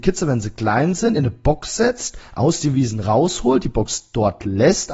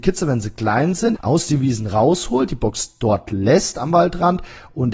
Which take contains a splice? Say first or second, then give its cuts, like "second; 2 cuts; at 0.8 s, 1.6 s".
second; 1 cut; at 1.1 s